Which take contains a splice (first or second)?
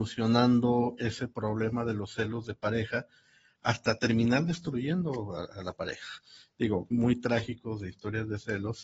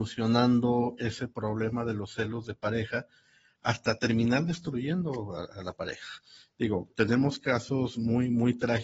first